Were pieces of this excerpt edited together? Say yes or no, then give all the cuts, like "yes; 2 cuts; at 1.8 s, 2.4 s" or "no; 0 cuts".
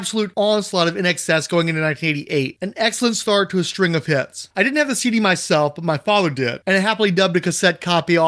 yes; 1 cut; at 2.6 s